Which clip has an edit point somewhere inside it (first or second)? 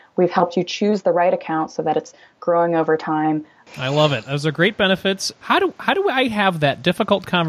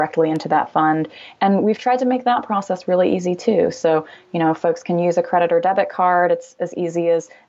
first